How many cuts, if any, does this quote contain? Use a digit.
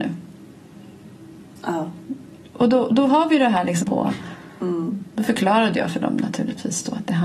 1